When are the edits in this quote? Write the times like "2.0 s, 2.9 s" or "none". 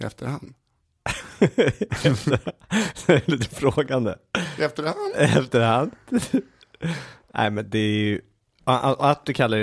none